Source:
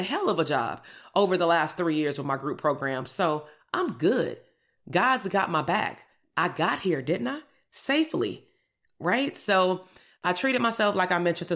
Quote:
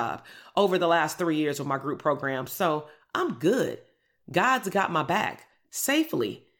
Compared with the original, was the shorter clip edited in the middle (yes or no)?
yes